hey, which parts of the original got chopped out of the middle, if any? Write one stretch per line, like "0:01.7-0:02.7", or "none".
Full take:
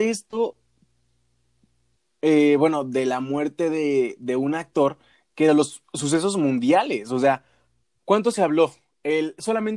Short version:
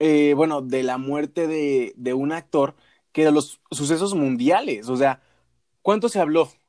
none